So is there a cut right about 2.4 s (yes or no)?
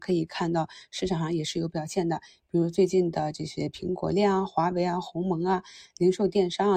no